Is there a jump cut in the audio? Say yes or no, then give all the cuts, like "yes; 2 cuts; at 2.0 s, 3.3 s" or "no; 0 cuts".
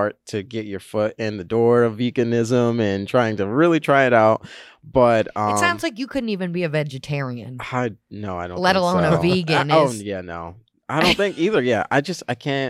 no; 0 cuts